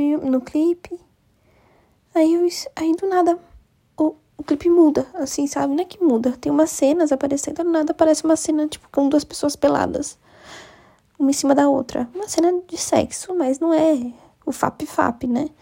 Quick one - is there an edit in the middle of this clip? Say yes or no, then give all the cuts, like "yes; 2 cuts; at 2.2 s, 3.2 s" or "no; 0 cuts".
no; 0 cuts